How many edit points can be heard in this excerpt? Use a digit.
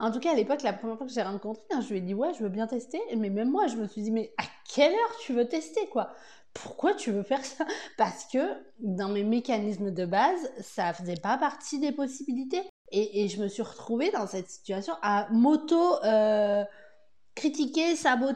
1